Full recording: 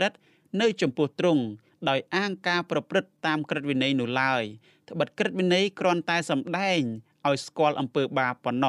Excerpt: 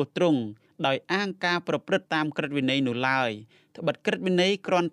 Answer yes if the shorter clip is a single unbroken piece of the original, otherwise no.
no